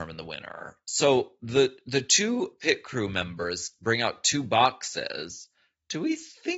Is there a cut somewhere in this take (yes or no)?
no